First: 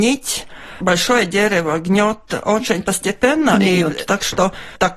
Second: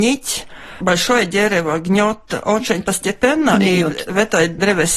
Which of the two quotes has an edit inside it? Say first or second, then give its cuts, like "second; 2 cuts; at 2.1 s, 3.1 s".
first; 1 cut; at 4.1 s